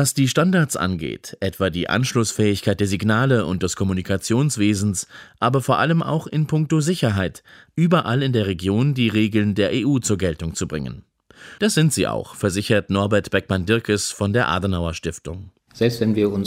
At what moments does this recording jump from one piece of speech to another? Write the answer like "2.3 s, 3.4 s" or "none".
7.7 s, 11.6 s